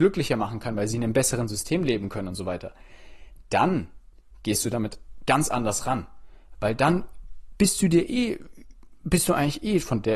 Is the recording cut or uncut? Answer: uncut